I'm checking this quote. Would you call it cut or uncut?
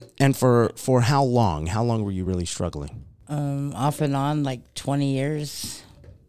uncut